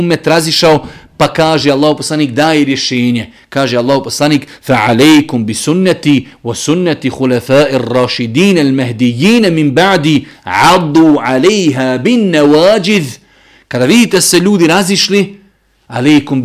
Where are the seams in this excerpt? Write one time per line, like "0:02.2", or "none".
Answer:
none